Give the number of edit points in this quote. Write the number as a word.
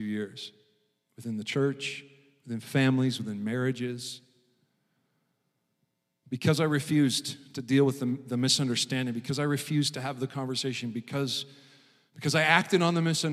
zero